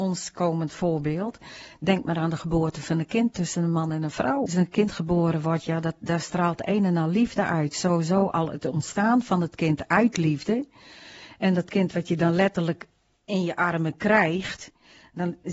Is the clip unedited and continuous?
no; 1 cut; at 4.5 s

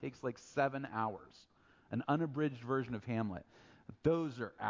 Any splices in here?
no; 0 cuts

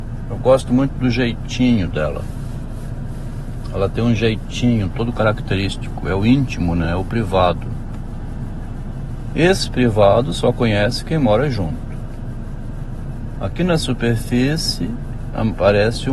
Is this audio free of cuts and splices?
yes; 0 cuts

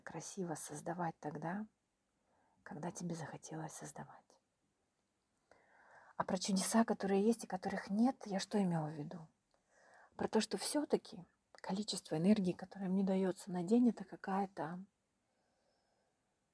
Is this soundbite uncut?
yes; 0 cuts

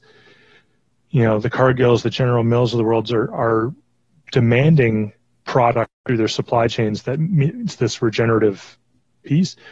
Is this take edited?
no; 0 cuts

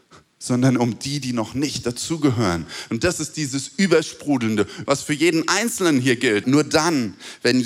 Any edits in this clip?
yes; 2 cuts; at 4.9 s, 6.4 s

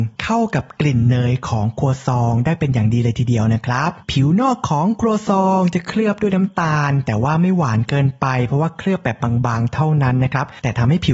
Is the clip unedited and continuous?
yes; 0 cuts

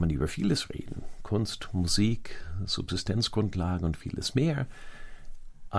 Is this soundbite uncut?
yes; 0 cuts

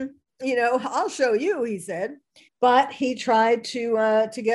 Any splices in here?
yes; 1 cut; at 2.4 s

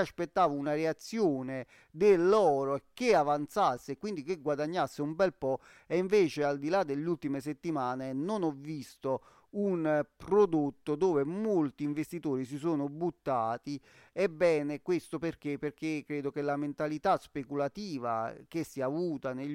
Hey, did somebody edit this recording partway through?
no; 0 cuts

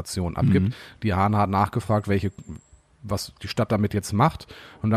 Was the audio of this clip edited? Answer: no; 0 cuts

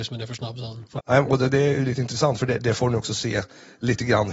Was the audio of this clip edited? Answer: yes; 1 cut; at 1.0 s

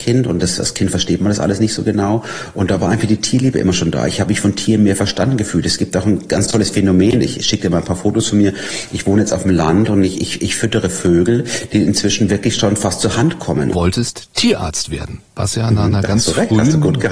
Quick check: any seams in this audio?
yes; 2 cuts; at 13.7 s, 15.3 s

